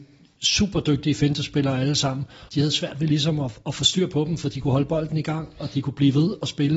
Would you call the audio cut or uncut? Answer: cut